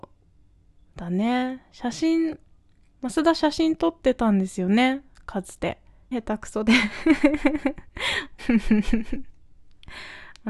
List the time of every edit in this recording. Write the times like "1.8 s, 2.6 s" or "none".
2.9 s, 6.1 s, 8.4 s